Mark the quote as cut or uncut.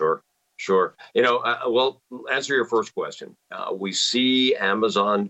uncut